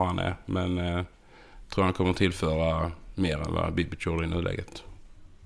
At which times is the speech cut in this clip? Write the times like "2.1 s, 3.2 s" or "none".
none